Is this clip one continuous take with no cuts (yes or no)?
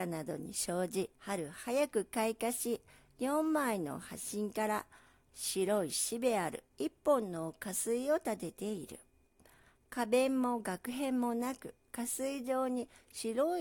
no